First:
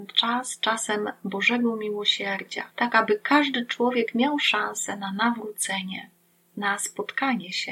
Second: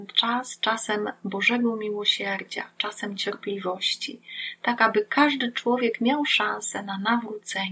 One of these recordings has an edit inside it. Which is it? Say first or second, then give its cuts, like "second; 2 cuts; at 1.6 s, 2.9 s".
first; 1 cut; at 2.7 s